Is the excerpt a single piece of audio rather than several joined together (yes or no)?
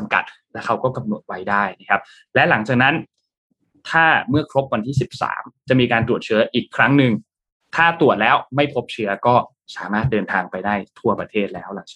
yes